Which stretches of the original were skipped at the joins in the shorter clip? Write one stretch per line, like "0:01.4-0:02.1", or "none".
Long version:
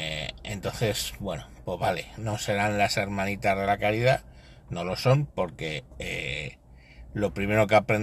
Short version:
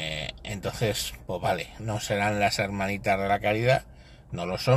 0:01.2-0:01.6